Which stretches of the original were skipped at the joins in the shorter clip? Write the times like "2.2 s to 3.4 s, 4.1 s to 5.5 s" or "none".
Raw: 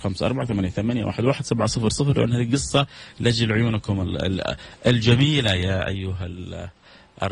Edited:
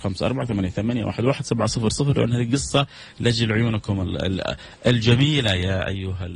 none